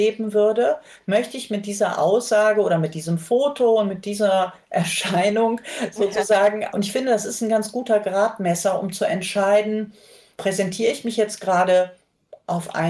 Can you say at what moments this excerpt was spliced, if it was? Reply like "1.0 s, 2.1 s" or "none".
6.7 s